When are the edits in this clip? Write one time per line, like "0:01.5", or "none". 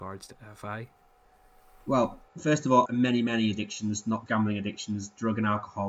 0:02.9
0:04.3